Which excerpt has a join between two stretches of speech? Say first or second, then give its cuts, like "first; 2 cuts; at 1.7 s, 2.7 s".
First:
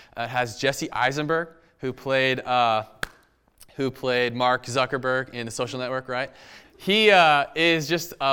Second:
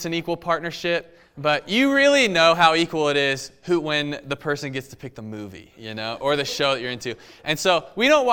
first; 1 cut; at 6.6 s